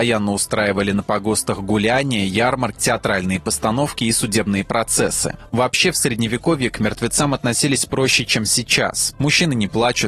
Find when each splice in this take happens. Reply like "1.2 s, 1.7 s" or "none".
2.8 s, 5.5 s, 9.1 s